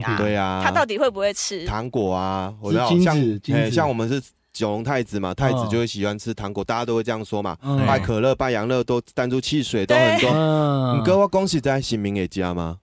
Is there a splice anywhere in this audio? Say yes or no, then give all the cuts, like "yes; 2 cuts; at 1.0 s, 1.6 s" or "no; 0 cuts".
no; 0 cuts